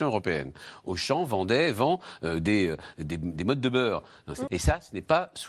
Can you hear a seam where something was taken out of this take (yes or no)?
yes